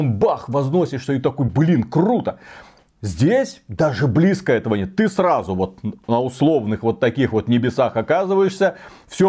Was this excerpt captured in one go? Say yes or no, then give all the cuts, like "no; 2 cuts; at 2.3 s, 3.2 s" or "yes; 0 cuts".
yes; 0 cuts